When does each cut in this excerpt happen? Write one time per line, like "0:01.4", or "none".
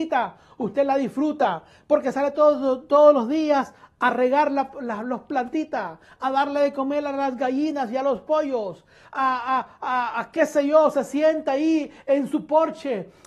none